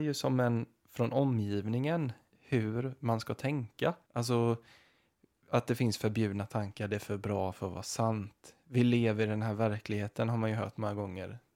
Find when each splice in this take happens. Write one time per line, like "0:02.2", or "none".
0:02.3
0:04.0